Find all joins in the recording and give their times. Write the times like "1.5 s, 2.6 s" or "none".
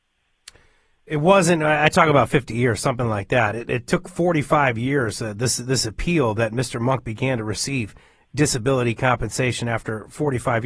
none